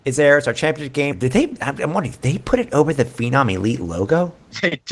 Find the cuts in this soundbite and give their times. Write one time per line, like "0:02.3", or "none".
0:01.1